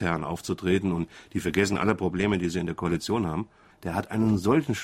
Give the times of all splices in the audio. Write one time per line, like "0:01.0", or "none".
0:03.7